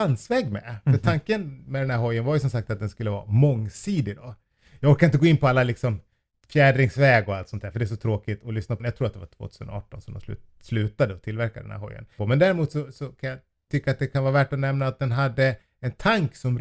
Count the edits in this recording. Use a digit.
2